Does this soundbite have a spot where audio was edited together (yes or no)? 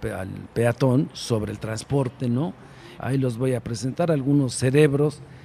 yes